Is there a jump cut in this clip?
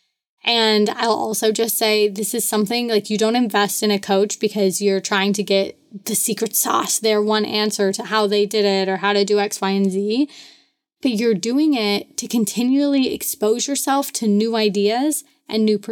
no; 0 cuts

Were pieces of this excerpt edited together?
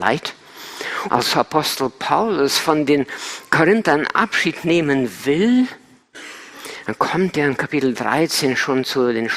yes; 1 cut; at 1.1 s

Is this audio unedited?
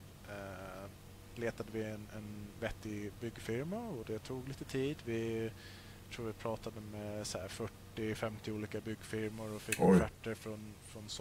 yes; 0 cuts

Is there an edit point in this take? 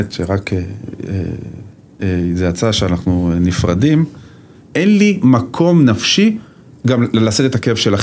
yes; 2 cuts; at 2.0 s, 4.6 s

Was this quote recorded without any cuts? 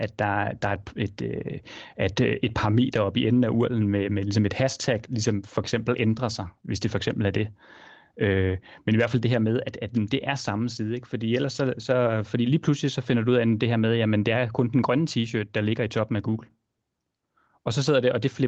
yes; 0 cuts

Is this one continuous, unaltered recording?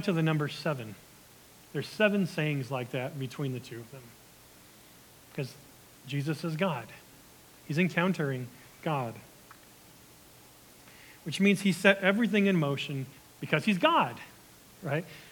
no; 1 cut; at 13.2 s

